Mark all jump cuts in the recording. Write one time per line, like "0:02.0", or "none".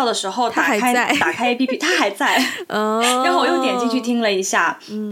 none